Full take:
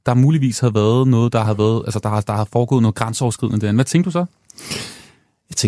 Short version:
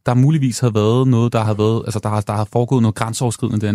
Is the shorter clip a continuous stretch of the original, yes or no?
yes